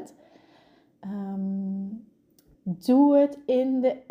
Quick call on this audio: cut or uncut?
cut